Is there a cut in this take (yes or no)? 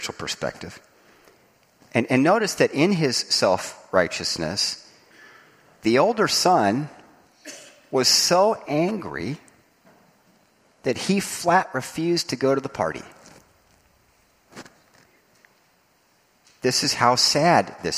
yes